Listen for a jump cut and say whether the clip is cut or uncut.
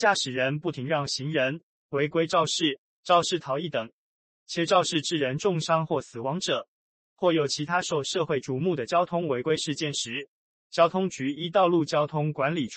uncut